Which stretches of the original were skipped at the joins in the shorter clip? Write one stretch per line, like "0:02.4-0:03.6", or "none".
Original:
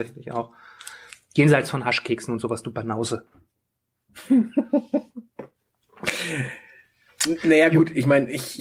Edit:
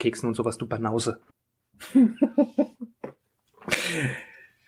0:03.3-0:03.7